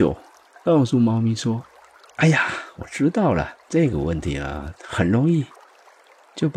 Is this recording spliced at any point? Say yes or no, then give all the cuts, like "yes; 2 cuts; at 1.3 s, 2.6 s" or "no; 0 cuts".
yes; 1 cut; at 3.6 s